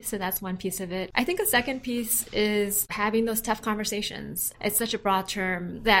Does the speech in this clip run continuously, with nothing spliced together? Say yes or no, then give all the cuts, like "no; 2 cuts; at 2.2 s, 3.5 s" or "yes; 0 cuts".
no; 1 cut; at 4.5 s